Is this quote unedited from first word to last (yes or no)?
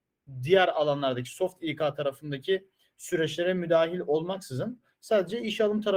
yes